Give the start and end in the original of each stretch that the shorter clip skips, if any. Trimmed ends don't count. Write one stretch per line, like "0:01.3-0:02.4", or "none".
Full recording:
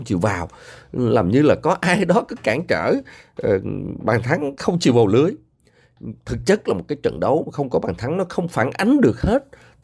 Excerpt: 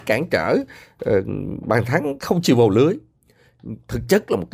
none